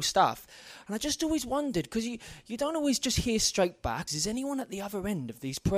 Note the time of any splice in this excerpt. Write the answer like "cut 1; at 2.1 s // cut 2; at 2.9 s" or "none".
cut 1; at 4.1 s

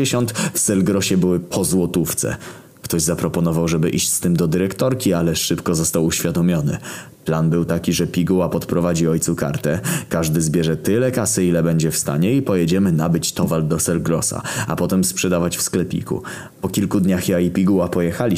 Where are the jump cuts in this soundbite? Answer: none

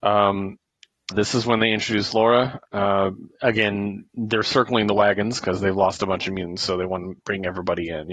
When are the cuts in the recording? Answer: cut 1; at 1.1 s // cut 2; at 4.1 s

